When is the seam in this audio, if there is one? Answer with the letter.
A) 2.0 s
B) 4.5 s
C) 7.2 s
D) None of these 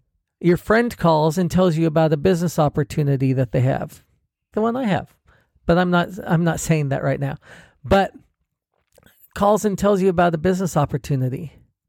B